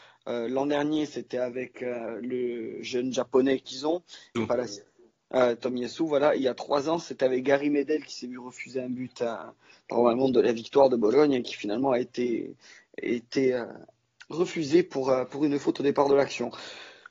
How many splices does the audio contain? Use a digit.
1